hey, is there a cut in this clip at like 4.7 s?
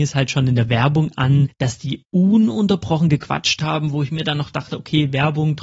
no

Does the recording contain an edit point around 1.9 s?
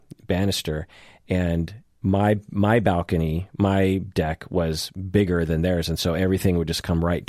no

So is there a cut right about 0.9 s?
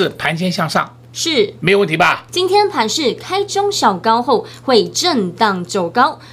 no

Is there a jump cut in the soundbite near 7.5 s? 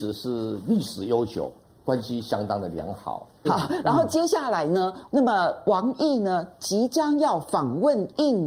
no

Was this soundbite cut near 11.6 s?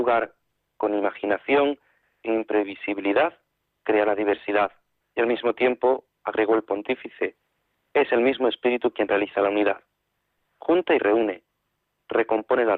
no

